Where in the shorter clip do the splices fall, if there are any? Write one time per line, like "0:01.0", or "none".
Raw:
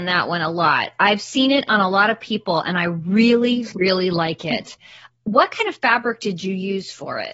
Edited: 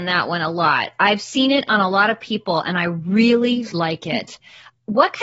0:03.7